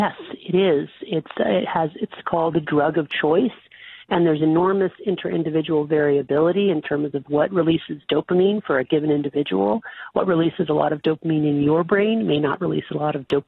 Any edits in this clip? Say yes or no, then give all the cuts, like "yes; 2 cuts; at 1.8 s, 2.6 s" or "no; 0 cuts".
no; 0 cuts